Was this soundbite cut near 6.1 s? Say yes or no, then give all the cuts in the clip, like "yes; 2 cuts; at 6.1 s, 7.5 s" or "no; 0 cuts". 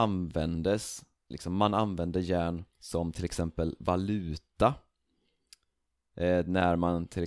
no; 2 cuts; at 1.3 s, 2.7 s